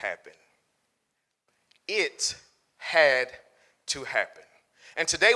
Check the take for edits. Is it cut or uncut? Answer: uncut